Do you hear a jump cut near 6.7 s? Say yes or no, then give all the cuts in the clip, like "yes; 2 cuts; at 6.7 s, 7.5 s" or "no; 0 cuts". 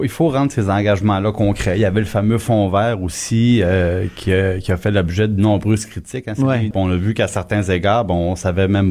yes; 1 cut; at 6.7 s